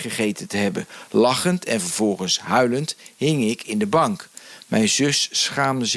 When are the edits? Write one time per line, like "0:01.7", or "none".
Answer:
none